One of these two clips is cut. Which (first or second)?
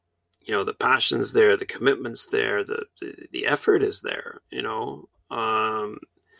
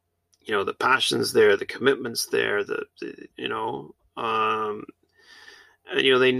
second